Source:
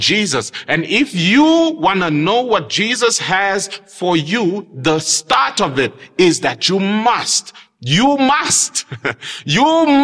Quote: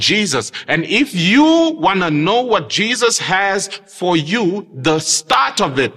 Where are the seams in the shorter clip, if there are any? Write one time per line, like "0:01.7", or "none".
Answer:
none

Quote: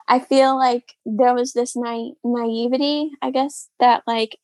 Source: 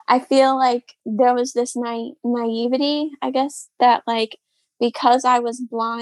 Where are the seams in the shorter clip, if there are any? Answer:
none

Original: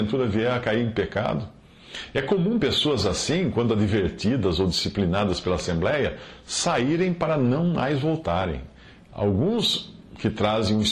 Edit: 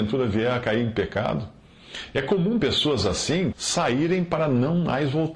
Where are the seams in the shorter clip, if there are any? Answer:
0:03.5

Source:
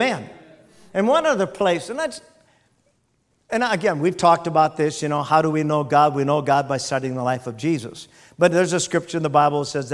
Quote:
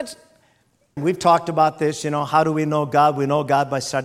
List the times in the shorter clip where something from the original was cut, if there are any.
0:01.0

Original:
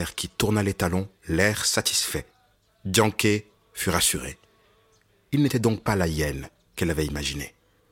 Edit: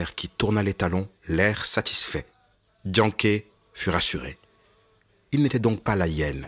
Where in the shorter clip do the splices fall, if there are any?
none

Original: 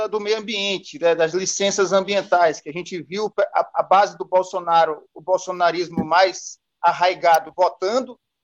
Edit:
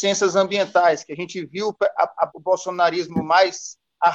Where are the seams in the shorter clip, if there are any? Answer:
0:02.3

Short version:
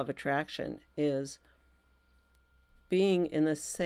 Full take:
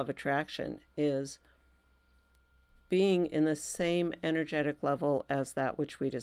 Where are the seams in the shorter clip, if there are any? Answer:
none

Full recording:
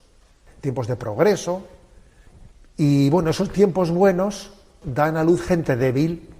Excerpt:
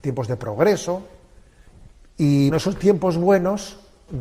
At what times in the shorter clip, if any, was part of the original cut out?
0:02.5

